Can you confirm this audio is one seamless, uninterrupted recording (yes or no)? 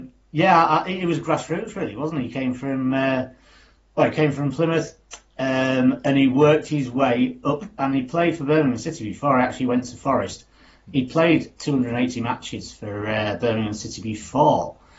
yes